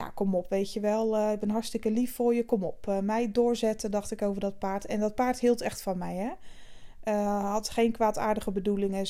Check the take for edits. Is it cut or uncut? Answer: uncut